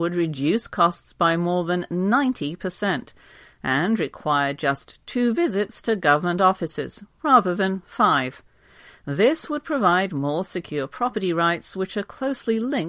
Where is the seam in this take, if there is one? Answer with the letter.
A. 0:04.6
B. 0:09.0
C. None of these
C